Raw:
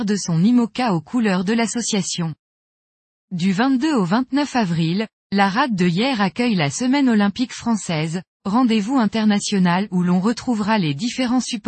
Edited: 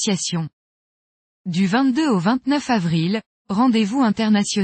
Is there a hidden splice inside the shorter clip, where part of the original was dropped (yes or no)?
yes